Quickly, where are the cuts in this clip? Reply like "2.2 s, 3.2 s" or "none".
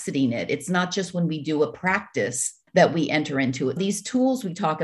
2.7 s, 3.8 s